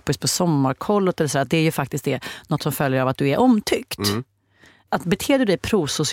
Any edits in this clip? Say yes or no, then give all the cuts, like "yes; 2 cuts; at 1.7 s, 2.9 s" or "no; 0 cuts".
no; 0 cuts